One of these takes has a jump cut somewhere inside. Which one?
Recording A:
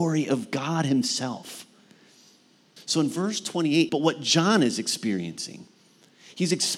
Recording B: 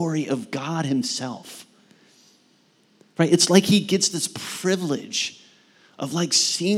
A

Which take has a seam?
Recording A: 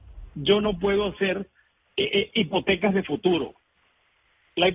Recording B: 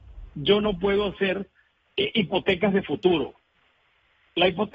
B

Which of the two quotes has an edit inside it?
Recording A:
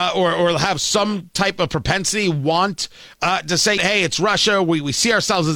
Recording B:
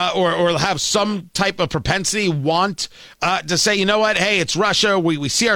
A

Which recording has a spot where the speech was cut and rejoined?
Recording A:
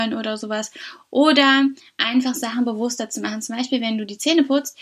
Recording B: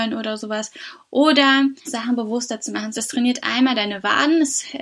B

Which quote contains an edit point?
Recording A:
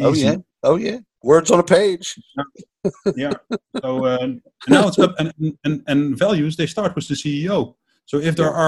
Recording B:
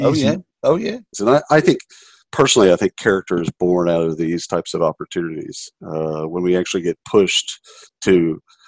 B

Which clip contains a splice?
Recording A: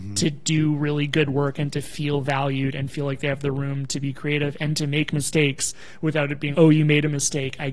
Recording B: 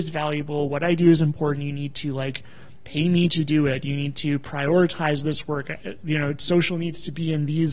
A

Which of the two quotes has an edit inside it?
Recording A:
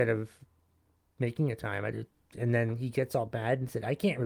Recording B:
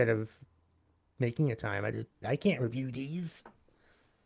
B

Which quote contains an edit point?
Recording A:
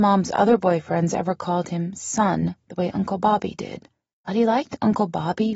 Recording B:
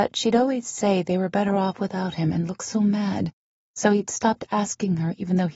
A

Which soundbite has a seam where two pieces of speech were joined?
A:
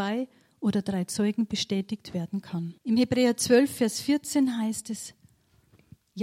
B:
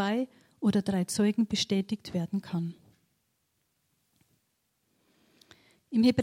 A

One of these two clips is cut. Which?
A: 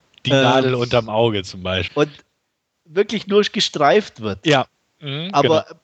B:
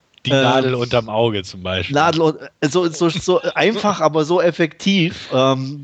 A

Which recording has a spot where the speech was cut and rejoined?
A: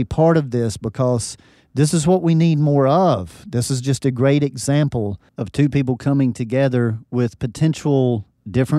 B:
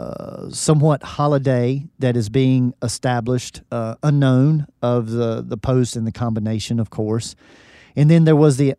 B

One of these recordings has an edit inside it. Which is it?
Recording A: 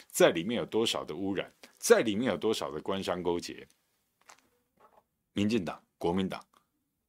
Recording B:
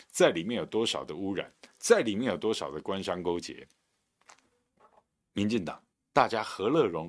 B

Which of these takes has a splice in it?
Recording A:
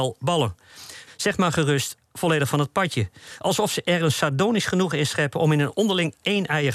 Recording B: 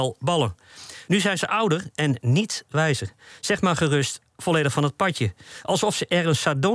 A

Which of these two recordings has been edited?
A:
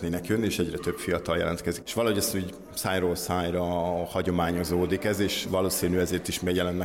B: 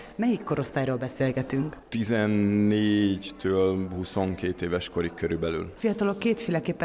A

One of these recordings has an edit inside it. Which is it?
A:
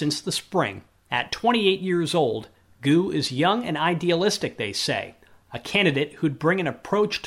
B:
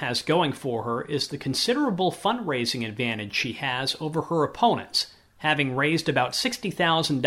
A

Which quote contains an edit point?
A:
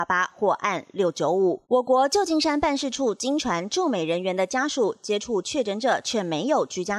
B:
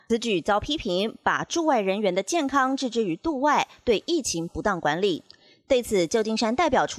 A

